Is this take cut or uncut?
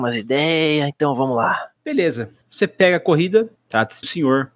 cut